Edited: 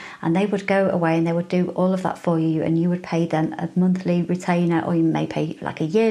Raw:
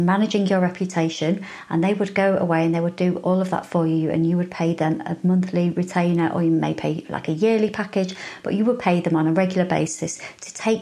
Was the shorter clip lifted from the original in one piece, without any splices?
yes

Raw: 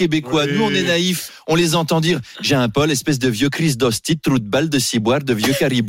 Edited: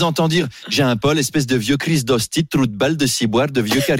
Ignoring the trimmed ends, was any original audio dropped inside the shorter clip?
no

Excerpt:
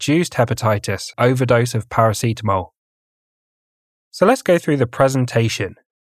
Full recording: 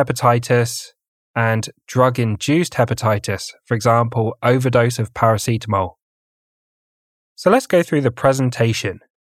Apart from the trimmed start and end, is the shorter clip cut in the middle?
yes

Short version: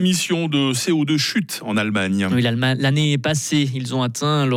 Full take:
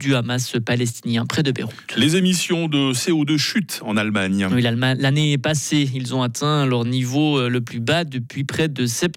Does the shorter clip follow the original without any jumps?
yes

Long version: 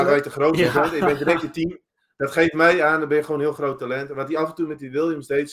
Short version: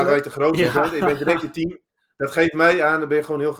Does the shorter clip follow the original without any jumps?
yes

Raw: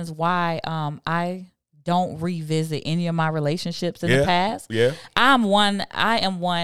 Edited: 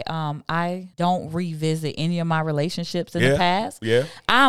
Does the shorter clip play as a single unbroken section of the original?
no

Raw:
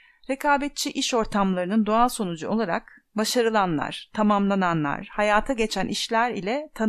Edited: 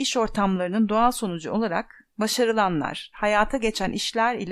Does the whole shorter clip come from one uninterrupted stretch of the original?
no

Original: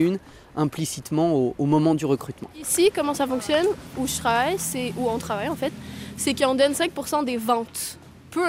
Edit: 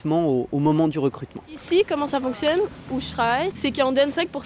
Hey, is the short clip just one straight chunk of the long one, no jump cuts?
no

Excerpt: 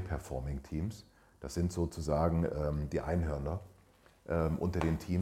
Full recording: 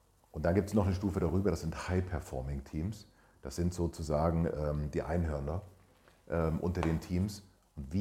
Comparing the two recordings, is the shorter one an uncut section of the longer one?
yes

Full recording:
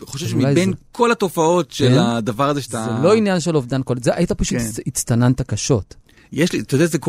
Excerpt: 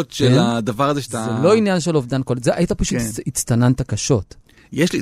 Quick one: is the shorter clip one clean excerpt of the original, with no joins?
yes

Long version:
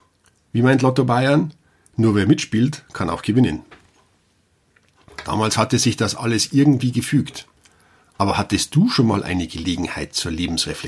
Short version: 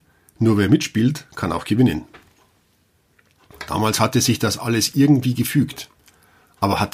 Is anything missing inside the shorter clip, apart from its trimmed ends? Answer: no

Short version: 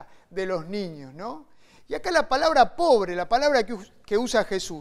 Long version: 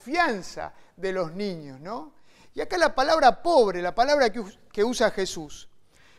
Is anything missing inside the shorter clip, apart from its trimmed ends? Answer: no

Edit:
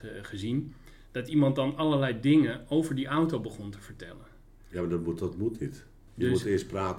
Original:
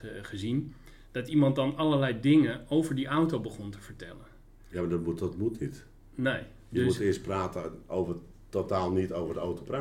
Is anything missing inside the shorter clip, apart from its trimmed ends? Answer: yes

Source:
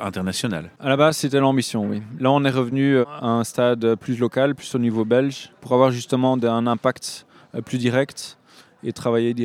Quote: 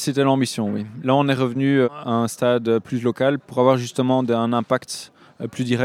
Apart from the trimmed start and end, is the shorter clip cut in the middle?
yes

